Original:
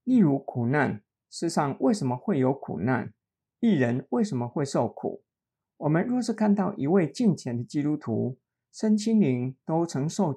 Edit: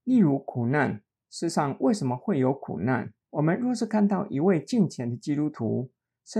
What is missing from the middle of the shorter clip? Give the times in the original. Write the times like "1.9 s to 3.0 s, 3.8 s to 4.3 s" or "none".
3.2 s to 5.7 s